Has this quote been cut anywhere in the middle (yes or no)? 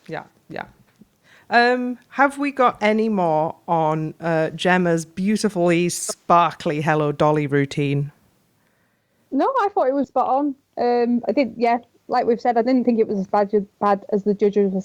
yes